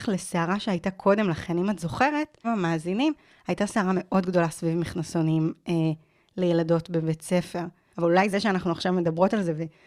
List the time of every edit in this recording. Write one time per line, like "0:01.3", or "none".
0:02.4
0:07.9